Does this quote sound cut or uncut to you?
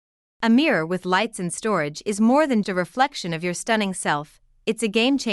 cut